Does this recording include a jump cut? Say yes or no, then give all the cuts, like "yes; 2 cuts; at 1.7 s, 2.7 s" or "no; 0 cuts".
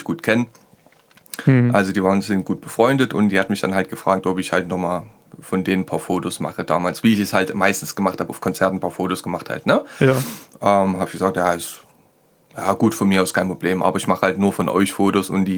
no; 0 cuts